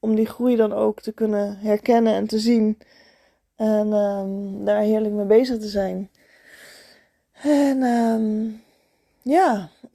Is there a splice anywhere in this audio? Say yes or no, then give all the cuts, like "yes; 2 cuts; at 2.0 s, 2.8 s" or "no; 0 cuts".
no; 0 cuts